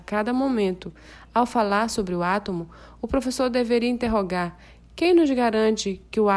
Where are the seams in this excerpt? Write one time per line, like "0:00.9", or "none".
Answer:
none